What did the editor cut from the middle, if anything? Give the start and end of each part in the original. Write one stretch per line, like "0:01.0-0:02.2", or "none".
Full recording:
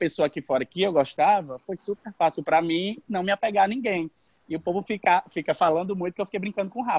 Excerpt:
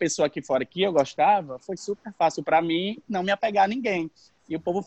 none